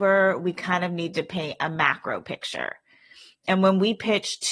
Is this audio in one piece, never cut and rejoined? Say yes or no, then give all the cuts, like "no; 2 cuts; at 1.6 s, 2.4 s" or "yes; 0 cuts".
yes; 0 cuts